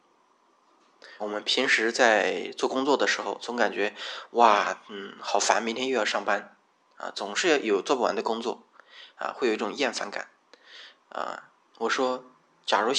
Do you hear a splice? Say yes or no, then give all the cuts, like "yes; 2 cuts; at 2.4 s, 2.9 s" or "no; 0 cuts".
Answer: yes; 2 cuts; at 1.2 s, 11.7 s